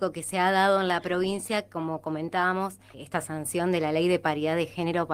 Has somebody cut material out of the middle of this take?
yes; 1 cut; at 2.9 s

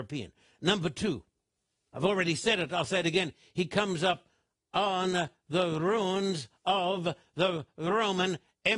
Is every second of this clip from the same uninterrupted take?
yes; 0 cuts

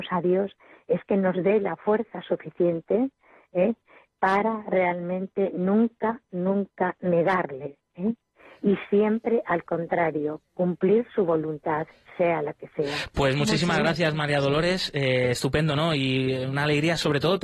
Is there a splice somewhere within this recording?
no; 0 cuts

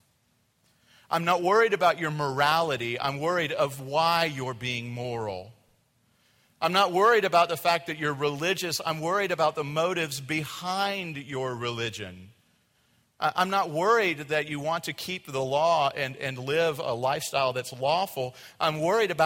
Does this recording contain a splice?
no; 0 cuts

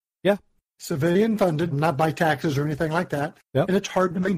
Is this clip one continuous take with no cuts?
no; 1 cut; at 1.7 s

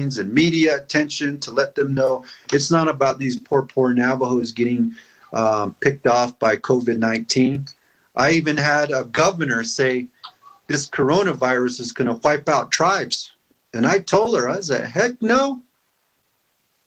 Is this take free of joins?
yes; 0 cuts

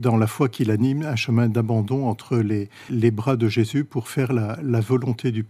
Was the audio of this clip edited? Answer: yes; 1 cut; at 2.9 s

